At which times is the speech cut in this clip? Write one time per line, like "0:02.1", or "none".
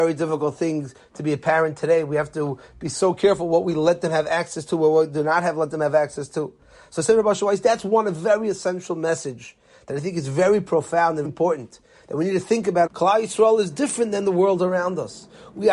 0:11.2
0:12.9